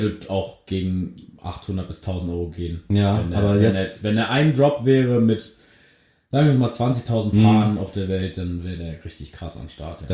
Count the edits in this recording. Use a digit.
0